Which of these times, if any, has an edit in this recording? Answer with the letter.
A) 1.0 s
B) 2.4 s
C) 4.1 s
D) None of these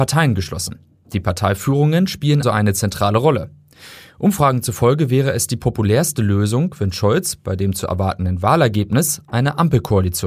B